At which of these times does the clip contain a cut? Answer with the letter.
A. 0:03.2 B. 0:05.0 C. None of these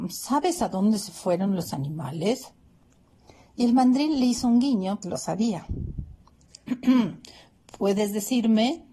B